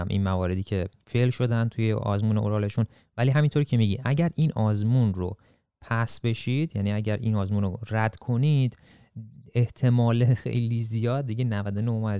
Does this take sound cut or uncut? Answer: cut